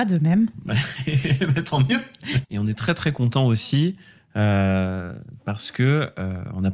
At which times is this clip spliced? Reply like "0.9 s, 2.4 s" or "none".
2.4 s

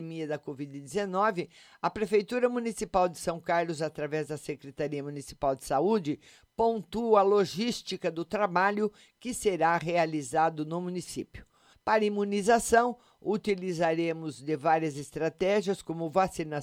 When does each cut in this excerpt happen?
11.7 s

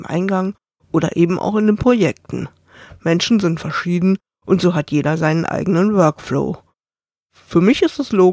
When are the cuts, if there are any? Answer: none

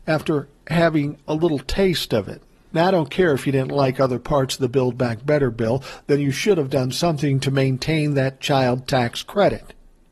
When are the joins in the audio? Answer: 2.7 s

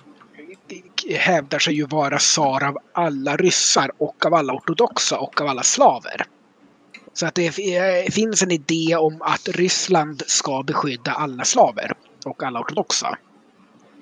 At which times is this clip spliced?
7.0 s

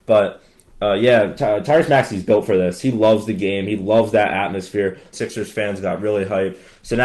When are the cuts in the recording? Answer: 5.1 s

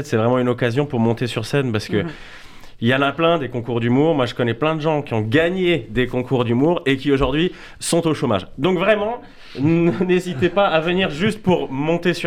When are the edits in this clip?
none

